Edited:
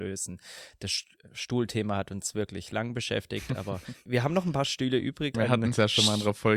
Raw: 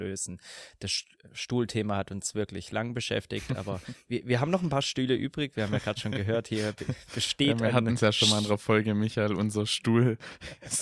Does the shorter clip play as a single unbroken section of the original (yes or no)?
no